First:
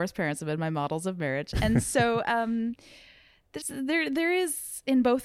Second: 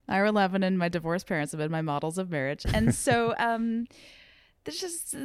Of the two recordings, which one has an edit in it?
first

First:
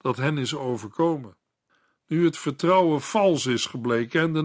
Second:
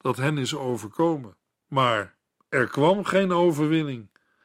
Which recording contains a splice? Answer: second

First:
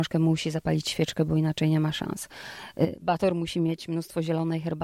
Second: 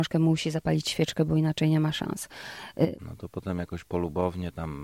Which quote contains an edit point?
second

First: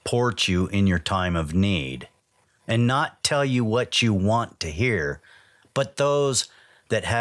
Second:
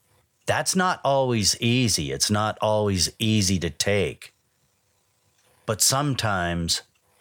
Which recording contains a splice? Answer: first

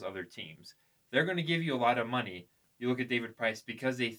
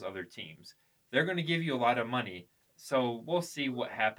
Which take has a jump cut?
second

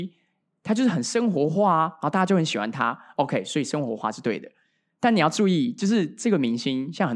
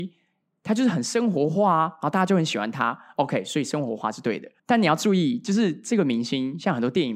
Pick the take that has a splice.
second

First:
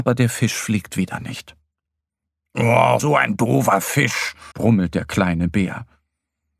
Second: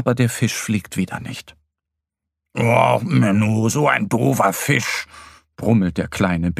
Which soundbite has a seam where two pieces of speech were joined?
first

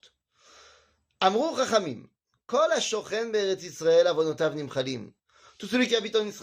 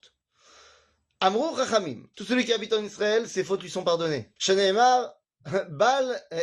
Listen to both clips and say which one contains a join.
second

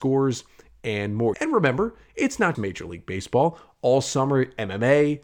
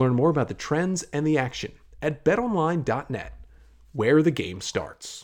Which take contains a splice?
first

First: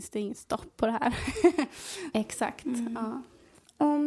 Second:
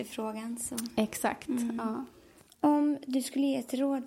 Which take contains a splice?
first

